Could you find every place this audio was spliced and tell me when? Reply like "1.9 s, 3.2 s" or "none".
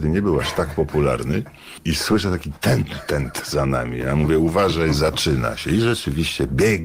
none

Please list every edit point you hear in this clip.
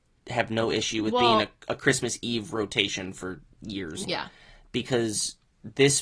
4.0 s

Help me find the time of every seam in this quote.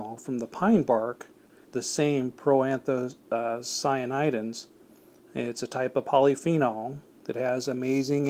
1.6 s

